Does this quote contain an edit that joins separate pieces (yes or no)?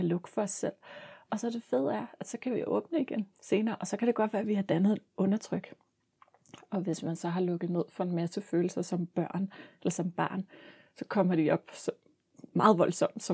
yes